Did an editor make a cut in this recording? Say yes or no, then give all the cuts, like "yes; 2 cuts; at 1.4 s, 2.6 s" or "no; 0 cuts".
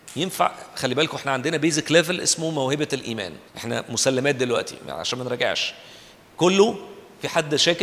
yes; 1 cut; at 3.5 s